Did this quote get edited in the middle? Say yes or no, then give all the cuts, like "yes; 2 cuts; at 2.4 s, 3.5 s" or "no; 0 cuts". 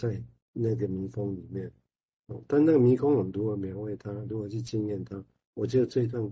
no; 0 cuts